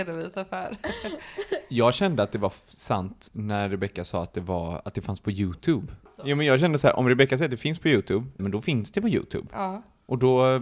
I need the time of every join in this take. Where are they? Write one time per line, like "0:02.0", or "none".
0:08.4